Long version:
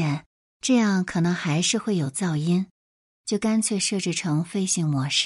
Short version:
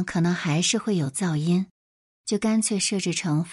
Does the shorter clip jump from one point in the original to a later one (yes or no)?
no